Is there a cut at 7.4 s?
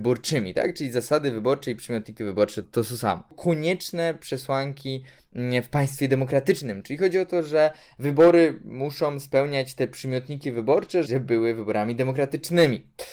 no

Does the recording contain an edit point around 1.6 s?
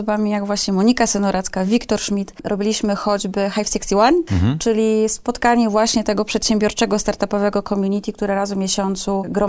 no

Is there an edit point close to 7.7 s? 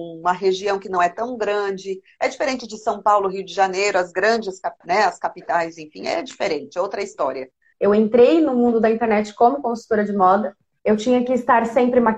yes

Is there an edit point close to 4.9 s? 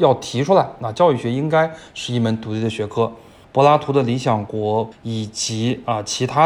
yes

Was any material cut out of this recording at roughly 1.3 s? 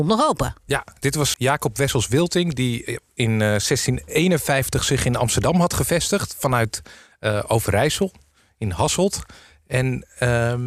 yes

